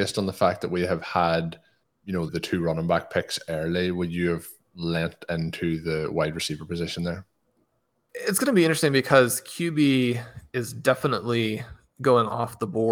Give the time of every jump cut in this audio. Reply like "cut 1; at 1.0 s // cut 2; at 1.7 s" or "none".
cut 1; at 2.3 s